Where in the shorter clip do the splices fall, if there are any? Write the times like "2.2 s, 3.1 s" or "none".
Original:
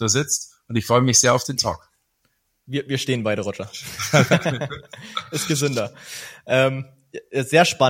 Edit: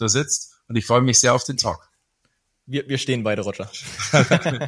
none